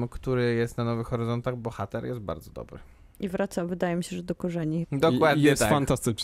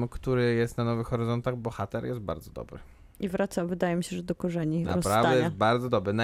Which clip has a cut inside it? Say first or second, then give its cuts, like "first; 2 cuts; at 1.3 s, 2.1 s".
first; 1 cut; at 4.8 s